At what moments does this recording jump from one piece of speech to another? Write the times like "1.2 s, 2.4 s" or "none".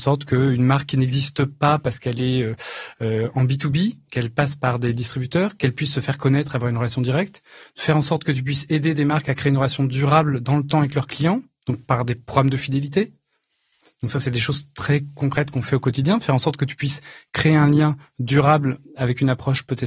none